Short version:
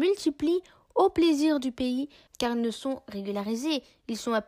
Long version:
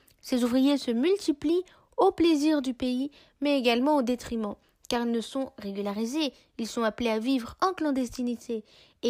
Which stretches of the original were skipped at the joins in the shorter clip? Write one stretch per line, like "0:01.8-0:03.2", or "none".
0:03.3-0:04.8